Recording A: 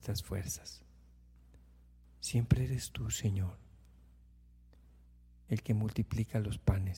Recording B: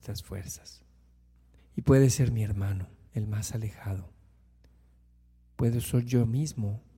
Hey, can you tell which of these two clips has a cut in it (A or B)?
B